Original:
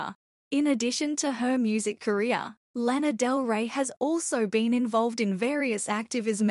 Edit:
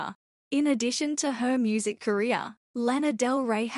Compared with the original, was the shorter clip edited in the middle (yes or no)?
no